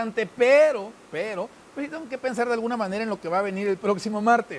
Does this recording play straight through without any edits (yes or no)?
yes